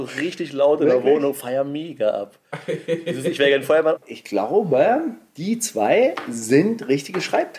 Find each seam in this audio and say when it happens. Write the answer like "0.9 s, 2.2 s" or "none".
4.0 s